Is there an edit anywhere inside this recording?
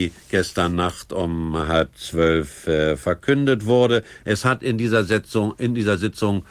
no; 0 cuts

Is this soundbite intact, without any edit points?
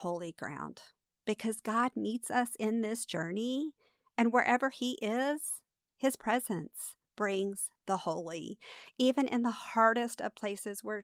yes; 0 cuts

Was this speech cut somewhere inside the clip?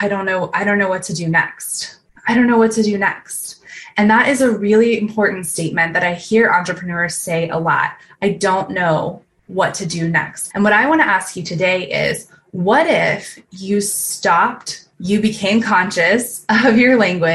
yes; 2 cuts; at 10.5 s, 14.9 s

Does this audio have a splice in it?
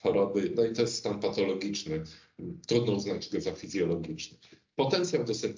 no; 0 cuts

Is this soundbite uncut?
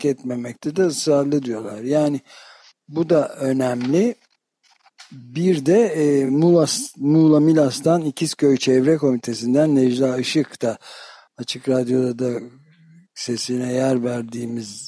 yes; 0 cuts

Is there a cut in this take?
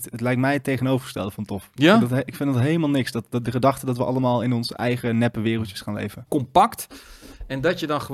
yes; 1 cut; at 6.3 s

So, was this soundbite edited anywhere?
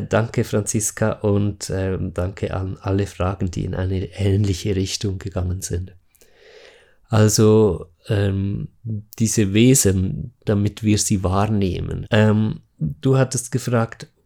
yes; 2 cuts; at 10.5 s, 12.0 s

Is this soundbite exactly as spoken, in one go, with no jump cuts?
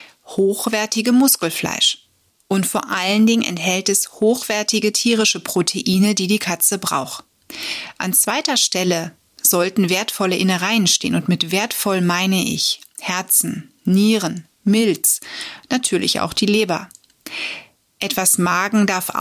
no; 1 cut; at 2.3 s

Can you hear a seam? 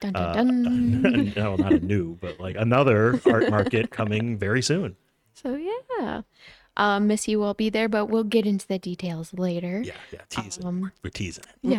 no; 0 cuts

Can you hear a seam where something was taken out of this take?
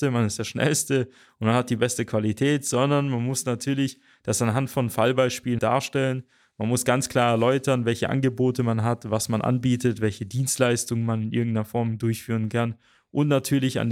yes; 1 cut; at 5.6 s

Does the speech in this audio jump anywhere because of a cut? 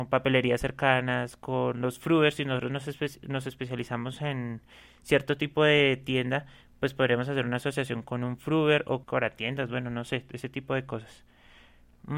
yes; 1 cut; at 9.0 s

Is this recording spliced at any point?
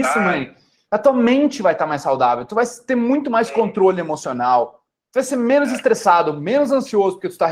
no; 0 cuts

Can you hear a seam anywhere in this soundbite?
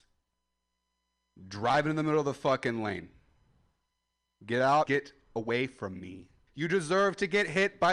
yes; 2 cuts; at 4.8 s, 6.5 s

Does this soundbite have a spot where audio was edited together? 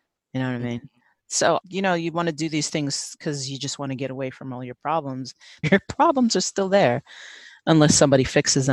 yes; 2 cuts; at 1.6 s, 5.6 s

